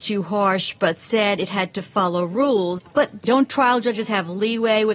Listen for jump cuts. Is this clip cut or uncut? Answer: uncut